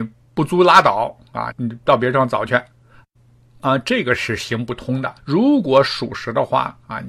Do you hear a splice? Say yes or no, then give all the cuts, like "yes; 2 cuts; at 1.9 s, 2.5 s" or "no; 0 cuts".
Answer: yes; 2 cuts; at 1.5 s, 5.2 s